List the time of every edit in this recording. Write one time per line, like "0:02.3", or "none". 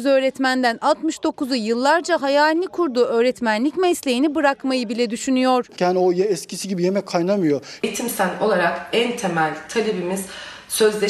0:05.8
0:07.8